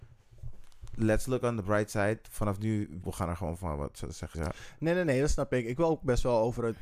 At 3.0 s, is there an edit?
yes; 2 cuts; at 3.0 s, 4.3 s

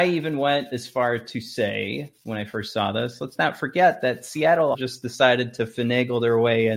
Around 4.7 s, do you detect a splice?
yes; 1 cut; at 4.7 s

